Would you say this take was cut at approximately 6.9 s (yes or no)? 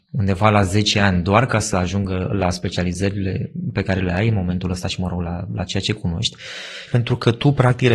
yes